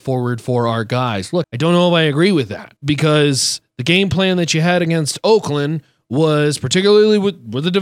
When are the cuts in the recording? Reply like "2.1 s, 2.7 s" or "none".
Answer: 1.4 s, 2.8 s